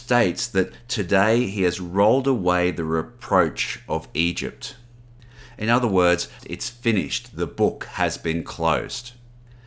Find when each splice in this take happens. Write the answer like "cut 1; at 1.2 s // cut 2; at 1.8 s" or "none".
cut 1; at 6.4 s